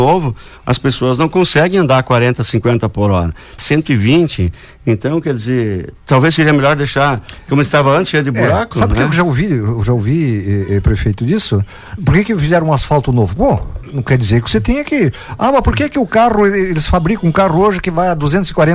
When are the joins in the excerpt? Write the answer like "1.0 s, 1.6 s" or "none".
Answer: 3.6 s, 12.0 s